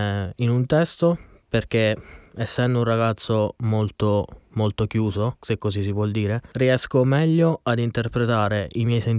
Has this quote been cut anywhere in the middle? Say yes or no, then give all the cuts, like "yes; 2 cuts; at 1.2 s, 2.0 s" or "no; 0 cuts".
yes; 1 cut; at 5.4 s